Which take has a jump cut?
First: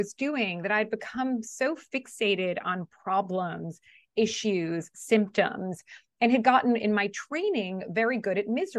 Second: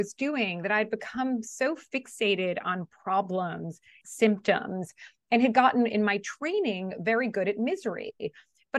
second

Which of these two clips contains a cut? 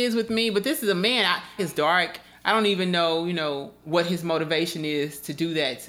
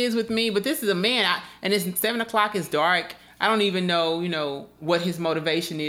first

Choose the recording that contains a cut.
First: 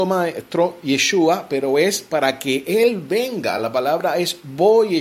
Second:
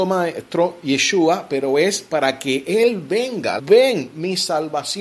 second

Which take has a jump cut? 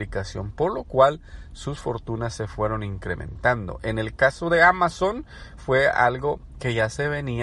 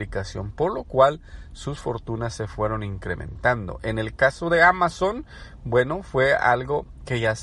first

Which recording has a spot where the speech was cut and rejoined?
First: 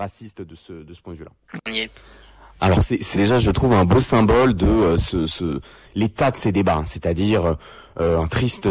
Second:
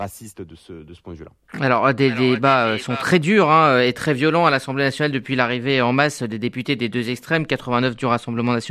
first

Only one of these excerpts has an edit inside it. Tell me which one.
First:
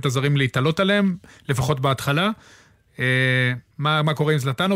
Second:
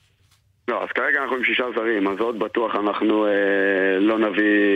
first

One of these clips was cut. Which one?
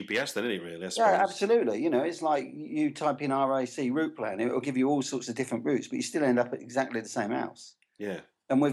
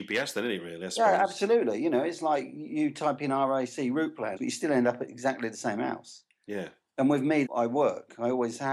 second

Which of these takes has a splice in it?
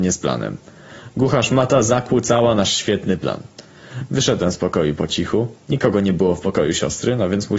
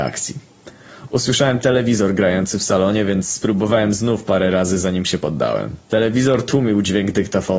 second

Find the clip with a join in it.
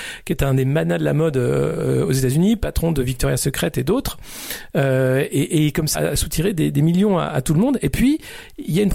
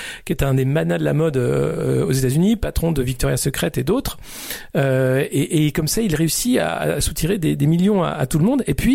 first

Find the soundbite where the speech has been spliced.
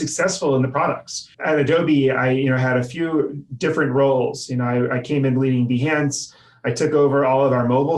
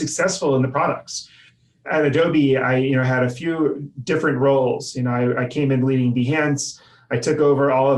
first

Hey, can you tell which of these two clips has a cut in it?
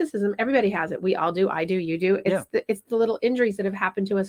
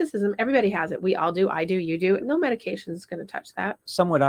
second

